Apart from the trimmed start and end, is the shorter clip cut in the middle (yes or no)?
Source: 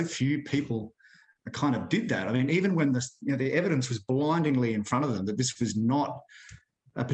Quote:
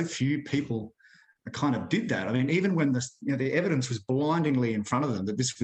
no